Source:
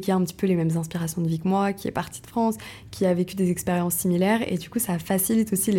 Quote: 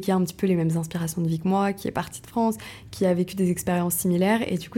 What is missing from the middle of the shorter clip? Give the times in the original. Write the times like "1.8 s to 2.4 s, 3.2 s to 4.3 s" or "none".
none